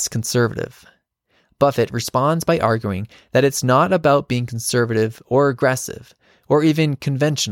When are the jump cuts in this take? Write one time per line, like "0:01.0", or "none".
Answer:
none